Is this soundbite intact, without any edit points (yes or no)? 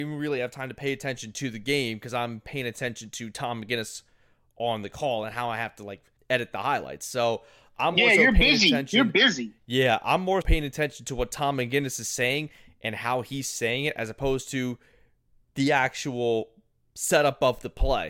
no